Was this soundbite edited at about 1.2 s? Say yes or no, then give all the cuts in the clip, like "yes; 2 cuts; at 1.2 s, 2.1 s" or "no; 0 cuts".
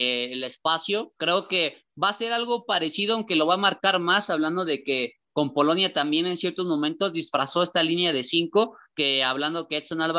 yes; 1 cut; at 1.2 s